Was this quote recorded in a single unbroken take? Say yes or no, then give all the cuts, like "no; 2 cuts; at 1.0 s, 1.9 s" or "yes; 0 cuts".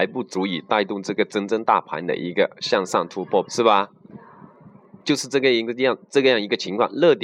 no; 2 cuts; at 3.5 s, 5.0 s